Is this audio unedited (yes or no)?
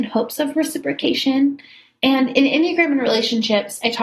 yes